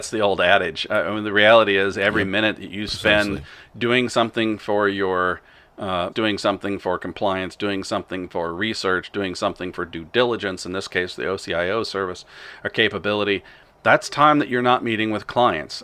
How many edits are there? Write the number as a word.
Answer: one